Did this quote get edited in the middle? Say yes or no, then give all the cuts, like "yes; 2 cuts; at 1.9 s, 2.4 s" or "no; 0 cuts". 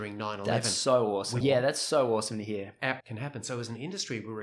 yes; 2 cuts; at 1.4 s, 3.0 s